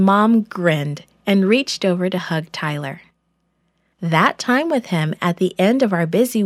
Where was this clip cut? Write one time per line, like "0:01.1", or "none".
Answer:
0:03.9